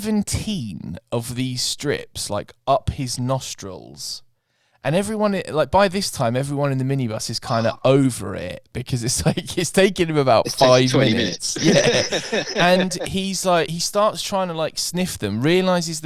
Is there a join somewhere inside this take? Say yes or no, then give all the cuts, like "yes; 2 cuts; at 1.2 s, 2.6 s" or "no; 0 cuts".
no; 0 cuts